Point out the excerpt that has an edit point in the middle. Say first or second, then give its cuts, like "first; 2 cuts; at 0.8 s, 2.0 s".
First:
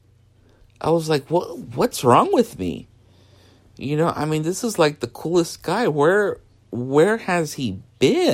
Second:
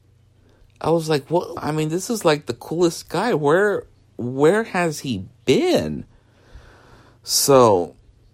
second; 1 cut; at 1.6 s